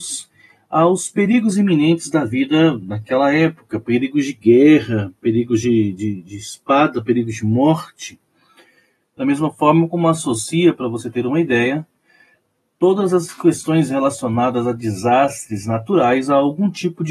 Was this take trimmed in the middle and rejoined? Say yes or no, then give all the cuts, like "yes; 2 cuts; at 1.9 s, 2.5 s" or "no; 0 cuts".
no; 0 cuts